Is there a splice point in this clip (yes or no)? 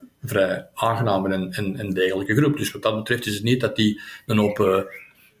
no